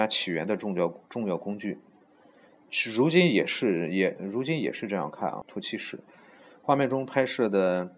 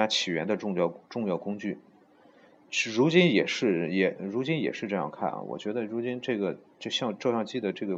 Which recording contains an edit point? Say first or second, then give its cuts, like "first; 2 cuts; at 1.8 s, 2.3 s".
first; 1 cut; at 5.4 s